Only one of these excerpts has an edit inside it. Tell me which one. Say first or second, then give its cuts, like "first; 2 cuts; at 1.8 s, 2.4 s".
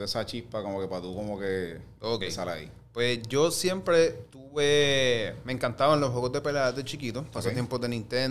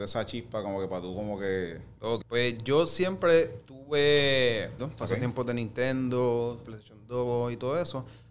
second; 3 cuts; at 2.2 s, 4.8 s, 6.6 s